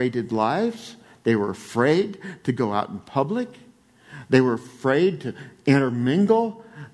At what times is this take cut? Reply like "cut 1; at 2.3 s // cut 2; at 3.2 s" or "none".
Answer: none